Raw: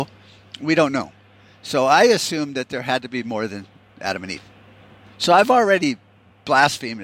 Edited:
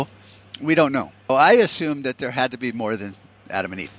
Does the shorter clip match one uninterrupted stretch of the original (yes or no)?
no